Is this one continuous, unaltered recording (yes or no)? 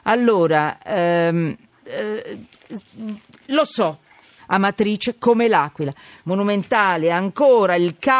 no